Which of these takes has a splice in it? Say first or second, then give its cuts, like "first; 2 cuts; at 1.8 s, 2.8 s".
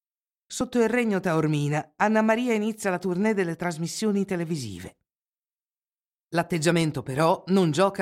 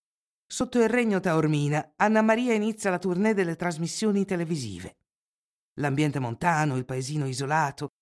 second; 1 cut; at 5.6 s